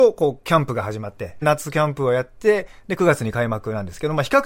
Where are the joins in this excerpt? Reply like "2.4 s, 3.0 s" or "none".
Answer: 1.4 s

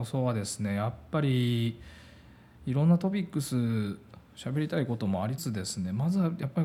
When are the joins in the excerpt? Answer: 5.4 s

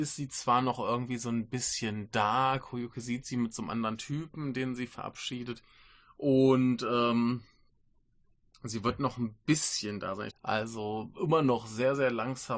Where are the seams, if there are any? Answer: 10.3 s

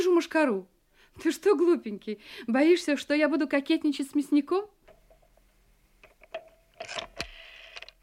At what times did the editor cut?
none

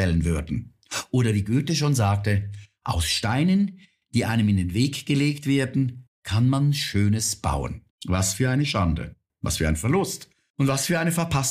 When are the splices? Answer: 7.9 s

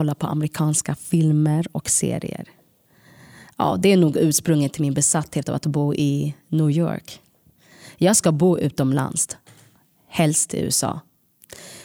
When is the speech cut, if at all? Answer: none

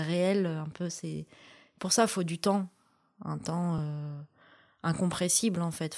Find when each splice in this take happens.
none

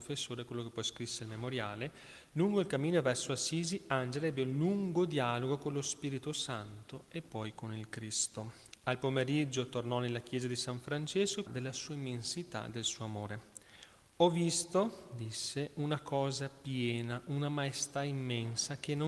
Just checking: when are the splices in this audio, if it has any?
11.5 s

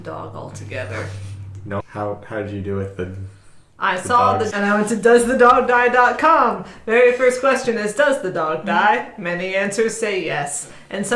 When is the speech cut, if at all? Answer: 1.8 s, 4.5 s

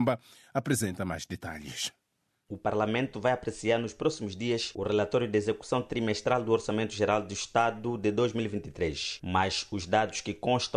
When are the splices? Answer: none

